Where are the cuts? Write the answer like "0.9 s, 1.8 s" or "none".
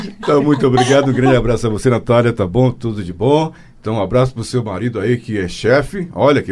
none